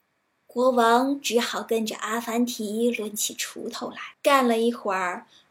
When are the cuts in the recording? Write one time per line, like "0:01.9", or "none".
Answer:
0:04.1